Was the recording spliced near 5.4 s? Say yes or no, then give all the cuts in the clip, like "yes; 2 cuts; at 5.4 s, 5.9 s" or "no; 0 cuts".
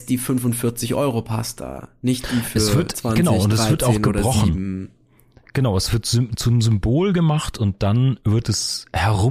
no; 0 cuts